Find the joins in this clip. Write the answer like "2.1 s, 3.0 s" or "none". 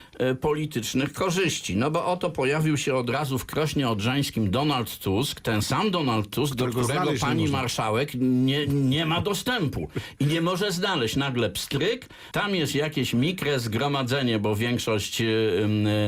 12.3 s